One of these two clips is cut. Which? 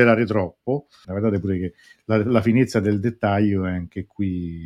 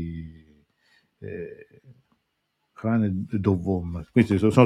first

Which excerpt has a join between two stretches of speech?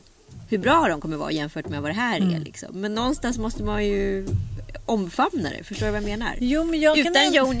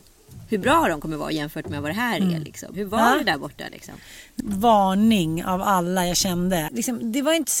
second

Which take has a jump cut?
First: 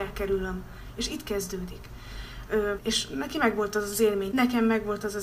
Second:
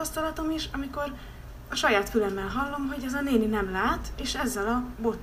first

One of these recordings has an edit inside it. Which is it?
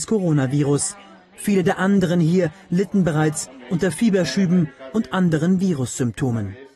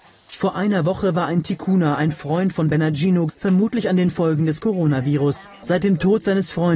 second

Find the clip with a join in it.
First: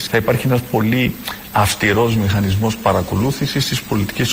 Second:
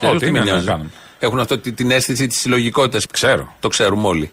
second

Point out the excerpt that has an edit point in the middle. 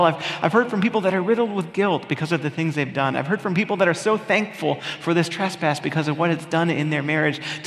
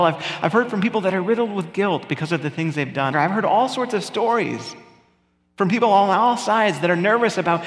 second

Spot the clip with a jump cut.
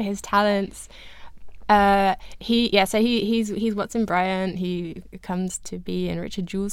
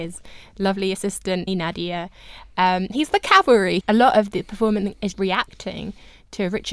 second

